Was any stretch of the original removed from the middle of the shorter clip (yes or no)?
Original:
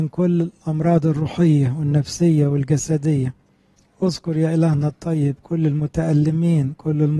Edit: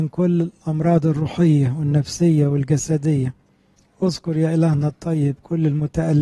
no